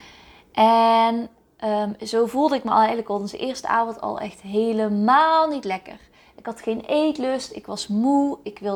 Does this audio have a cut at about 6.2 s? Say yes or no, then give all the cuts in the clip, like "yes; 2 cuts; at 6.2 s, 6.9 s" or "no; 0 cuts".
no; 0 cuts